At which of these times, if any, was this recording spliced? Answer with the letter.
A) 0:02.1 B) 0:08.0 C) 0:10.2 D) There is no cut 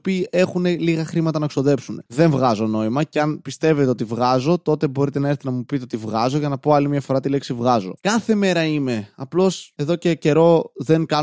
B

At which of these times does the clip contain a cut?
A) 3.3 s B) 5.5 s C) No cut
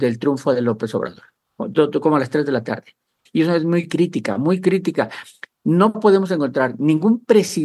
A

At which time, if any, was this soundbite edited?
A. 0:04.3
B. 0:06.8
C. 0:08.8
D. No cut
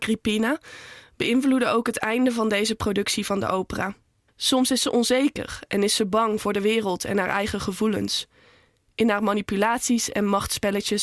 A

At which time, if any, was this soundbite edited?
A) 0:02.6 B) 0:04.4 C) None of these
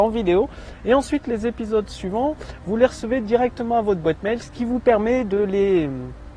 C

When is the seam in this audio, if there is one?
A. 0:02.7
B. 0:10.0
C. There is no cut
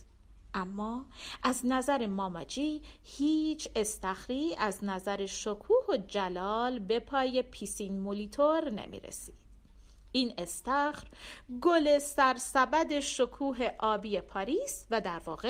C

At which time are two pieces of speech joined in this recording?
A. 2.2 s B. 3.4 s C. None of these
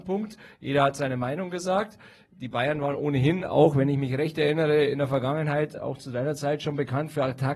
C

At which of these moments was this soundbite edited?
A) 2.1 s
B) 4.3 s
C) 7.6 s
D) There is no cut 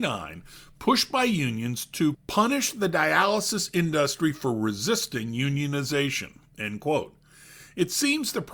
A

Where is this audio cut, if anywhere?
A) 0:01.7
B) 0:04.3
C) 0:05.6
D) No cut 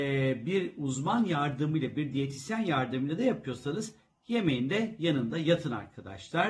D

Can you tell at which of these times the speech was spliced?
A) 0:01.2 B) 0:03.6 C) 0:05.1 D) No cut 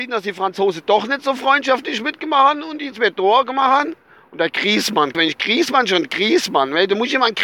C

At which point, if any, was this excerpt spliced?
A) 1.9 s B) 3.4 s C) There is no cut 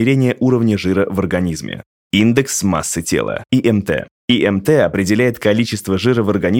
A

